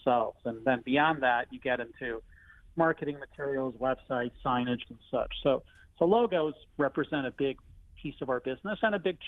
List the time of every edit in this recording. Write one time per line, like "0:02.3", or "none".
0:04.9
0:06.7